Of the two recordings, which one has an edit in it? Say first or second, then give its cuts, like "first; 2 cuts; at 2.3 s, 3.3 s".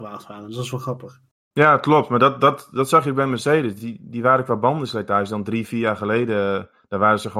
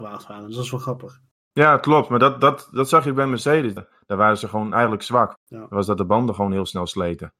second; 2 cuts; at 3.8 s, 5.4 s